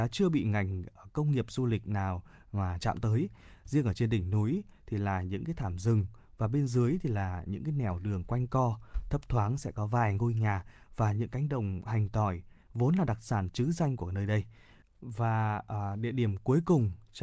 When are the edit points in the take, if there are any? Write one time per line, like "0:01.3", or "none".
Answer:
0:14.8